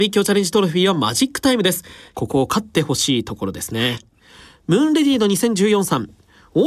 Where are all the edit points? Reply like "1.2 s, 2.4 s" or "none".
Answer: 2.1 s